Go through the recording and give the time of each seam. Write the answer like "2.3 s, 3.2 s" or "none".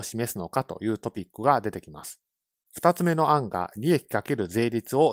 none

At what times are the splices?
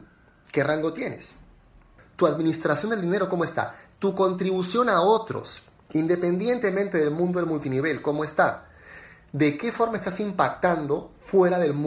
2.0 s

